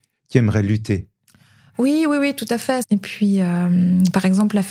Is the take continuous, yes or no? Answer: no